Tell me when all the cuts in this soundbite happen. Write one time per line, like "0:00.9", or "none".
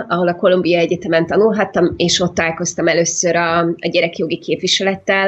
none